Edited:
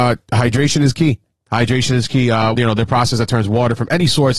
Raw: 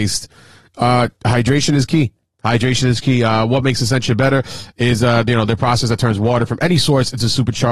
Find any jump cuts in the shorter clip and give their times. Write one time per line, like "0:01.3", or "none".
0:02.5